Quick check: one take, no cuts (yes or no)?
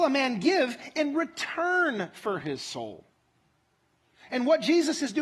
yes